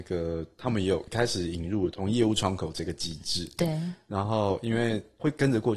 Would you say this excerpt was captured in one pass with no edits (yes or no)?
yes